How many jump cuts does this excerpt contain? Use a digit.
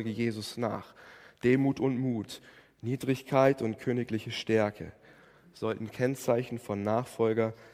0